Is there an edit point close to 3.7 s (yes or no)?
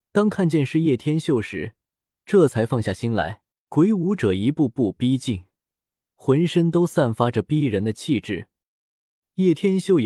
yes